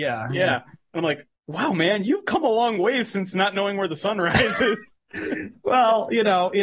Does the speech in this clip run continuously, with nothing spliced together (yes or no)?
no